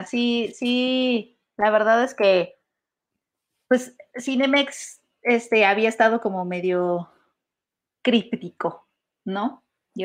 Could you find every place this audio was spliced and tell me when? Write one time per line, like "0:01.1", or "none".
none